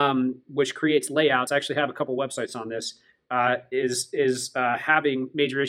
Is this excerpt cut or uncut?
uncut